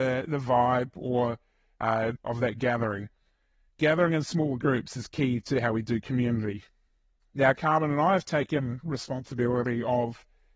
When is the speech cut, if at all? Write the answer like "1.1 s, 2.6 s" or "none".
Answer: 2.2 s